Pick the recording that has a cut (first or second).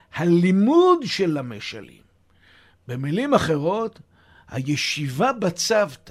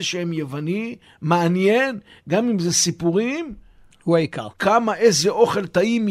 second